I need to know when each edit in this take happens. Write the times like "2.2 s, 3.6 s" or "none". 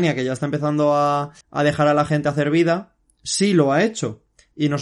1.4 s